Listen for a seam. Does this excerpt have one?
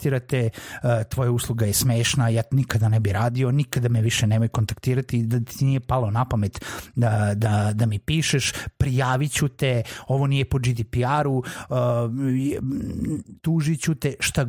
no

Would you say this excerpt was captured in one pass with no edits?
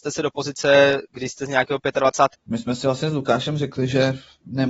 no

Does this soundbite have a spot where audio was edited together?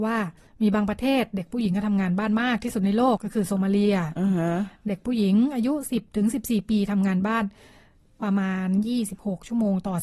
yes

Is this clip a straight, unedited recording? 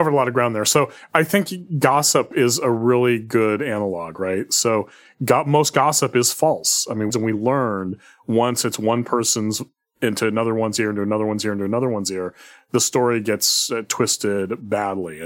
no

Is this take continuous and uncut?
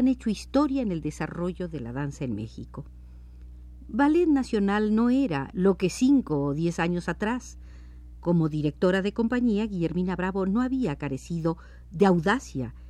no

